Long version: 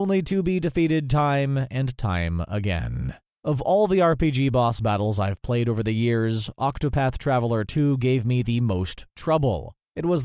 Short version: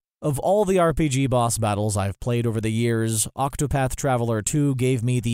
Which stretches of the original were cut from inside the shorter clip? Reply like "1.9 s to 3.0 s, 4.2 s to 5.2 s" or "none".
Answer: none